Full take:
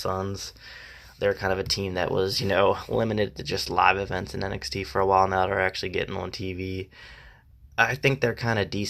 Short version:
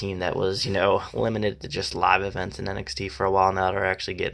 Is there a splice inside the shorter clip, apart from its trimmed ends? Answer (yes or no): no